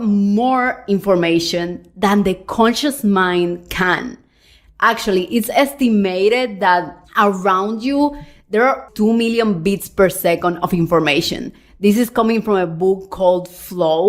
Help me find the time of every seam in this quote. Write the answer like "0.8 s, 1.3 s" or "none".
8.9 s